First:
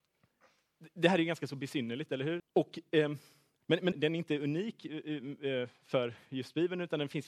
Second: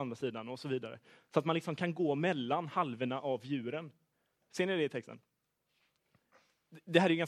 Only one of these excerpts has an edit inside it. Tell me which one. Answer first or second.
first